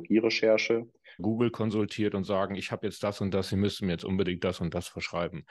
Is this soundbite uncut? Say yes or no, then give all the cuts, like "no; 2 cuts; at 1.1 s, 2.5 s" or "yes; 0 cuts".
no; 1 cut; at 1.2 s